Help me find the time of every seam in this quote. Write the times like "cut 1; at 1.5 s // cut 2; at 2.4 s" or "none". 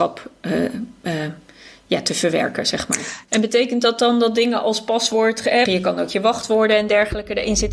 cut 1; at 3.3 s // cut 2; at 5.7 s

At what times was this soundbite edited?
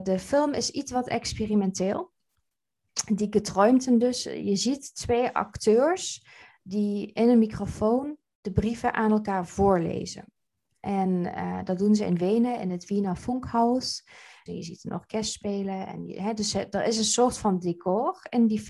cut 1; at 14.5 s

